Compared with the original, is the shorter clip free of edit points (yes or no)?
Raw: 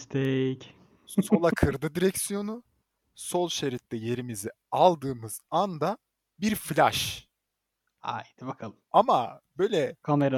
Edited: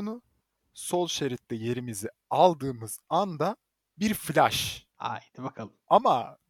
no